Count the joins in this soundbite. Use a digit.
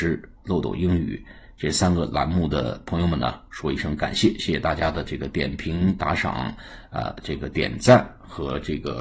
0